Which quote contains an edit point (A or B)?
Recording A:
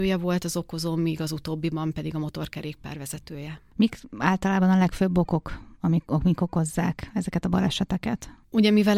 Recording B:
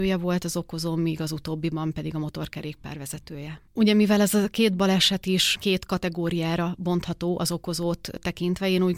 B